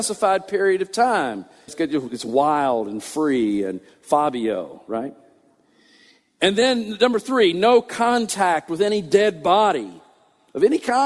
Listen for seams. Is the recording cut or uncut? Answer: cut